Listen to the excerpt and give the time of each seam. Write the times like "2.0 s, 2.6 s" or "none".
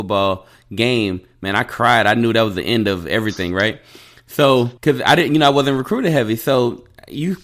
4.8 s